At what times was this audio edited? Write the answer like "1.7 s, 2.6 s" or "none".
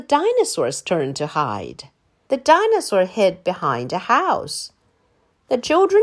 2.3 s